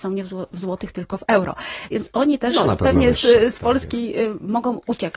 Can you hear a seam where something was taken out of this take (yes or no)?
no